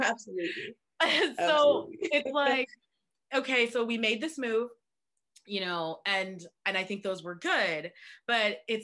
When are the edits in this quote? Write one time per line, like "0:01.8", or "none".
none